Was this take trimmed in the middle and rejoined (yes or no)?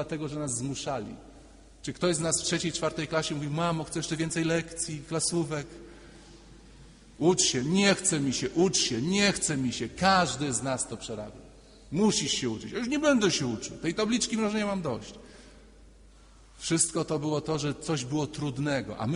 no